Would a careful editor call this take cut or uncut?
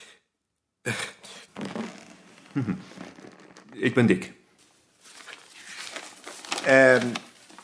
cut